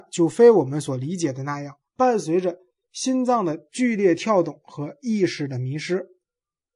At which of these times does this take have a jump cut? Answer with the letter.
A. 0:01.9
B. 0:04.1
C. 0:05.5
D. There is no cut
A